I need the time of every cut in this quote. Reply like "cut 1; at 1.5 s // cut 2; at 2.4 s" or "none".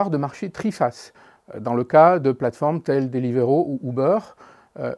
none